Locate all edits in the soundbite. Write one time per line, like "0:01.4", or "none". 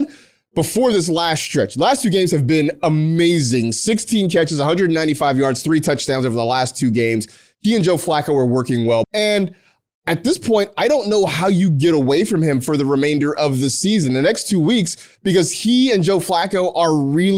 0:09.0